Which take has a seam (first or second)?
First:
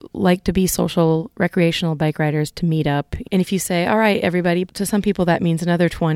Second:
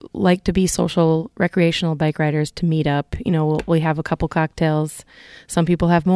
first